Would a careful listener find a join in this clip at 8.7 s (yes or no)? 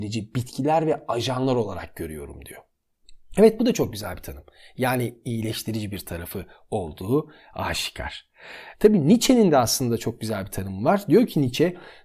yes